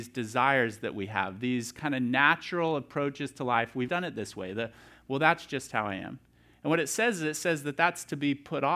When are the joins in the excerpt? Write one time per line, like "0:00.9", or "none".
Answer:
0:03.9